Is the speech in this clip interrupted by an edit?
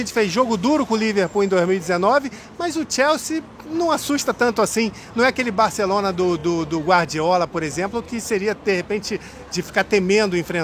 no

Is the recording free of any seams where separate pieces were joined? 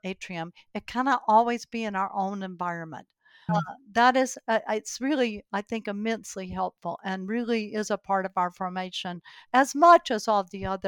no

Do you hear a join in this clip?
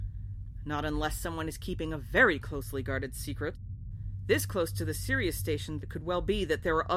yes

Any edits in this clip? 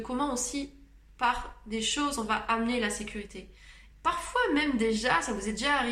yes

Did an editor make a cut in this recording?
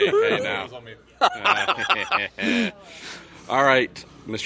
no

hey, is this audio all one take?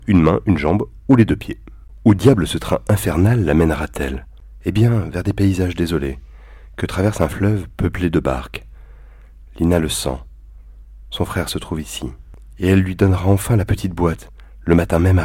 yes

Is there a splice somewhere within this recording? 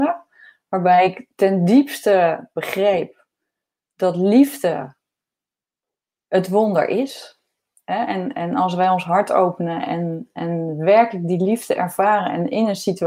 no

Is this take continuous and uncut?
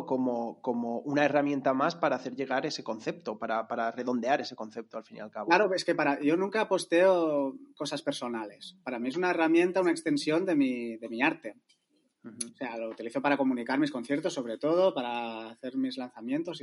yes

